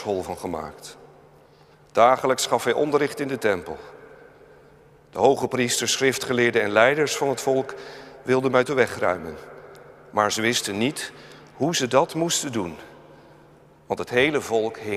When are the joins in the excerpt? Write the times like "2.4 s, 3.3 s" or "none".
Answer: none